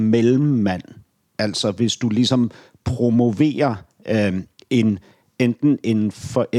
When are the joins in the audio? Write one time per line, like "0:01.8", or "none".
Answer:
none